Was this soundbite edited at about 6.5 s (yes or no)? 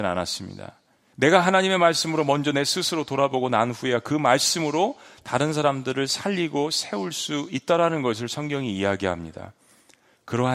no